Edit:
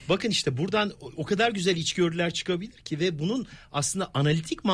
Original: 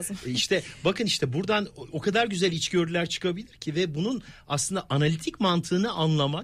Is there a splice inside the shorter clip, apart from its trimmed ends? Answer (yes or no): no